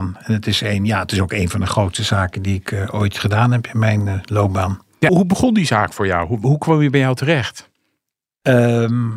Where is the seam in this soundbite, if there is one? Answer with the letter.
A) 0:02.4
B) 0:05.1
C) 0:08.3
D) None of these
B